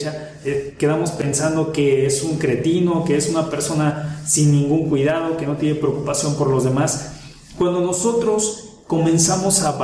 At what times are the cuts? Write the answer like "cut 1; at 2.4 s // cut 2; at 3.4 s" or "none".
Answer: none

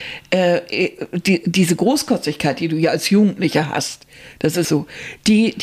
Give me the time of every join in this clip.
cut 1; at 4.6 s

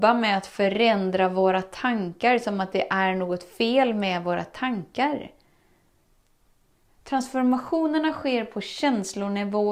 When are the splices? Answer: cut 1; at 6.9 s

